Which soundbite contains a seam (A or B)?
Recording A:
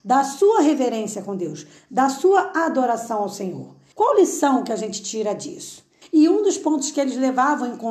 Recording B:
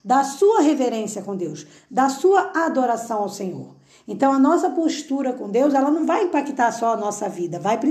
A